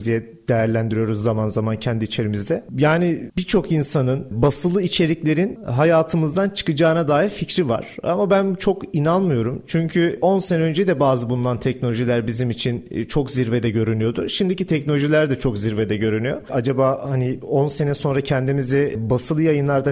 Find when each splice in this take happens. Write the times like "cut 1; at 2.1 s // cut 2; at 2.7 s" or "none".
cut 1; at 16.5 s